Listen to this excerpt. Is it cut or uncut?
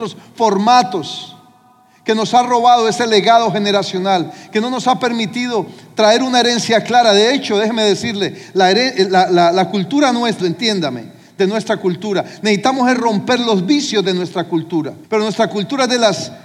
cut